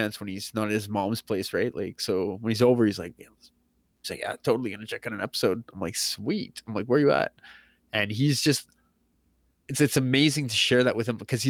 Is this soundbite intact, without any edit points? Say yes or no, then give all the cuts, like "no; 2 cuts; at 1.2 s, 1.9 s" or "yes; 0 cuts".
yes; 0 cuts